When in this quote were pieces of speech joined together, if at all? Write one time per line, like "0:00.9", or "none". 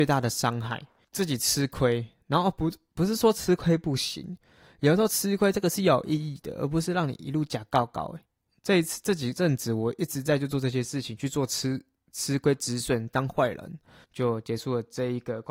0:14.0